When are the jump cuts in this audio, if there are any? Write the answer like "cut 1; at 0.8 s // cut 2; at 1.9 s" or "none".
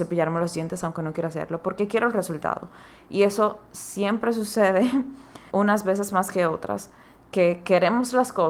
cut 1; at 5.5 s

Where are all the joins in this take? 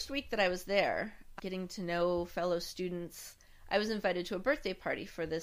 cut 1; at 1.4 s

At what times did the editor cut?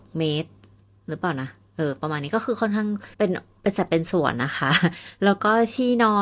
cut 1; at 3.1 s

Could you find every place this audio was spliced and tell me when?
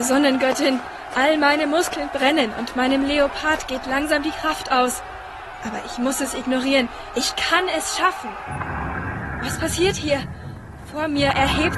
none

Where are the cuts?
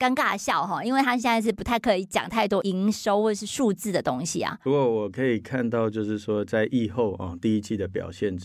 none

